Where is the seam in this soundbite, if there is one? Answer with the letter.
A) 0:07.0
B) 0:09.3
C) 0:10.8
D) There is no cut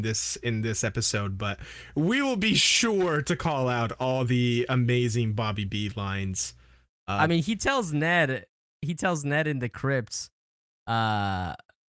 D